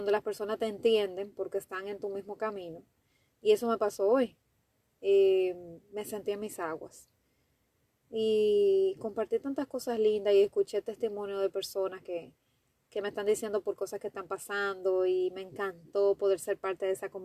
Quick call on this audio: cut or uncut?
uncut